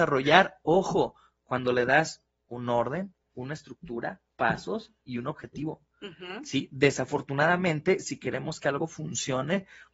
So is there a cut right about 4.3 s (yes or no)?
yes